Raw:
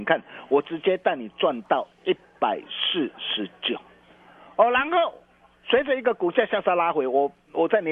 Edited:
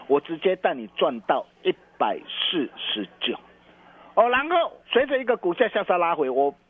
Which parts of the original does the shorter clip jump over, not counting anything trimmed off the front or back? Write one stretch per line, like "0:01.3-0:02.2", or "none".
0:05.2-0:05.6